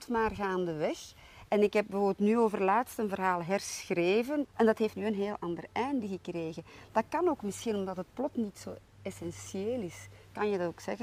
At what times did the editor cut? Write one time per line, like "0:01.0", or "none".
0:04.4